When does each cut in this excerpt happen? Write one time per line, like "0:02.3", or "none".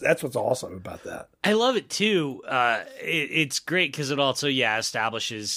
none